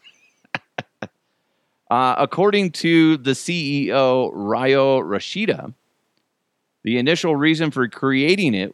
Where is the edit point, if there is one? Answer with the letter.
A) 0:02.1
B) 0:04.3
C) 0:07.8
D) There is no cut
D